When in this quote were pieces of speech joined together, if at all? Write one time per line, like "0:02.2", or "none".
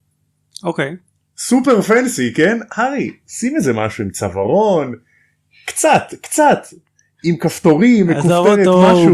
none